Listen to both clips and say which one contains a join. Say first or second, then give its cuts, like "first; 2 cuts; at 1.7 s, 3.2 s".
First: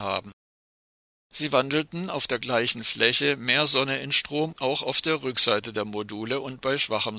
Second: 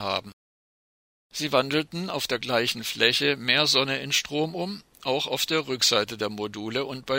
first; 1 cut; at 4.5 s